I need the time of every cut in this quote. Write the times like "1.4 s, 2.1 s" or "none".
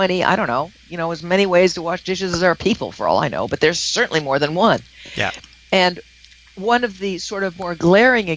none